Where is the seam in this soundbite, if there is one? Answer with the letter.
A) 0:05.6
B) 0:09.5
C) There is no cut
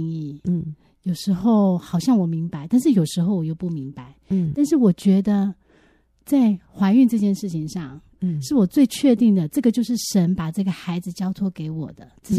C